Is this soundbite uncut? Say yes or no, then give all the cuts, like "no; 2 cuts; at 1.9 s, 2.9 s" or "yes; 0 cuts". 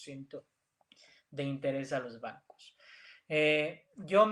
yes; 0 cuts